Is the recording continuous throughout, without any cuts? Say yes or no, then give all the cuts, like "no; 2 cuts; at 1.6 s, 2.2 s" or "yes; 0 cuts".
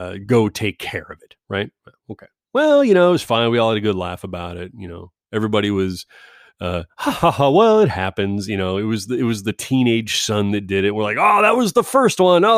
yes; 0 cuts